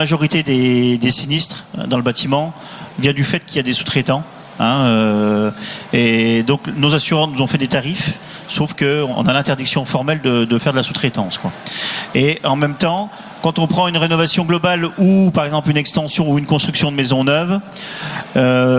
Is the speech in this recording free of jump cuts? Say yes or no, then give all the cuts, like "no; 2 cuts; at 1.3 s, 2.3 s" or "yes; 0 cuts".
yes; 0 cuts